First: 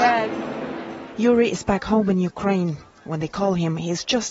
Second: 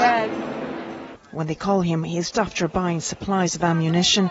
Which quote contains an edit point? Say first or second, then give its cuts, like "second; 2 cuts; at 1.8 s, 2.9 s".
second; 2 cuts; at 1.2 s, 2.3 s